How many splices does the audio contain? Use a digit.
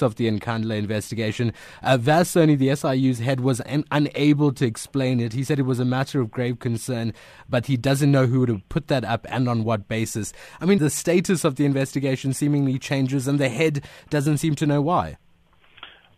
1